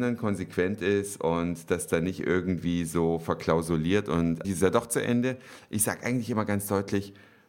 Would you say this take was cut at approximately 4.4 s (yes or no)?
yes